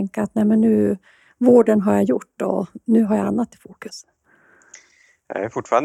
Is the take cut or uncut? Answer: uncut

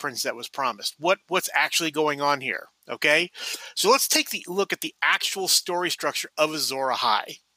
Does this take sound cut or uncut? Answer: cut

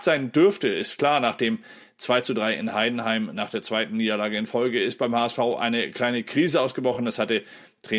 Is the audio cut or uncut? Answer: uncut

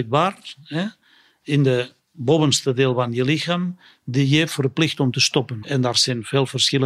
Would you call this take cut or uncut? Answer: cut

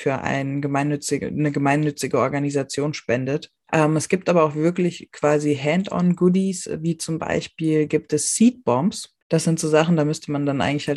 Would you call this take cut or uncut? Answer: cut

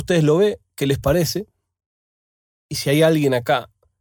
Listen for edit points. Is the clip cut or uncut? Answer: uncut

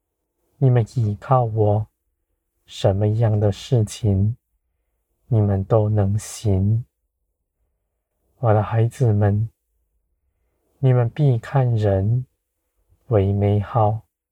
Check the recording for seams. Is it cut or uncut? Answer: uncut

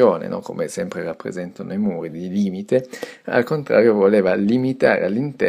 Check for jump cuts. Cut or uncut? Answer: uncut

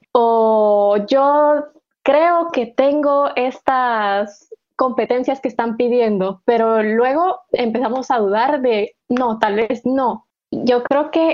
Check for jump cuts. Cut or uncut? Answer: cut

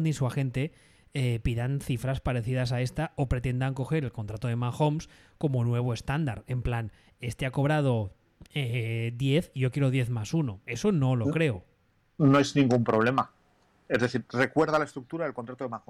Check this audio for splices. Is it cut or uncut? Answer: uncut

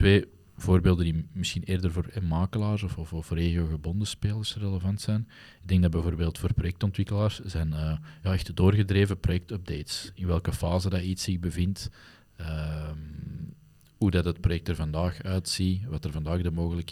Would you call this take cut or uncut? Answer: uncut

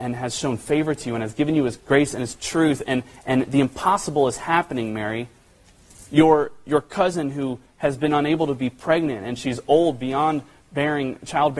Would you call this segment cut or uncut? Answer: cut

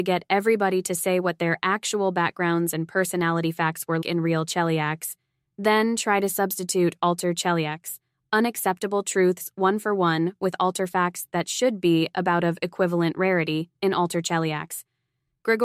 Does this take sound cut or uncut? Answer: cut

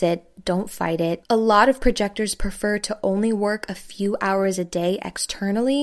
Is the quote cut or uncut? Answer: cut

